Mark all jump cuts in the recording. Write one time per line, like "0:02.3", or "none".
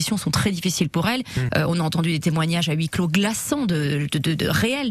0:01.5